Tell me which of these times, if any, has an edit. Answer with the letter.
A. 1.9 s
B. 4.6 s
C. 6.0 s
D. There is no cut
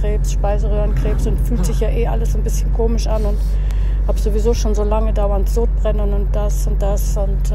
D